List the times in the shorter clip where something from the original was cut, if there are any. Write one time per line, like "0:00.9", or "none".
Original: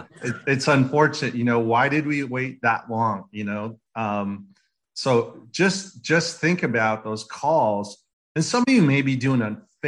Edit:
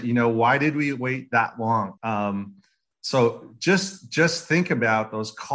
0:02.0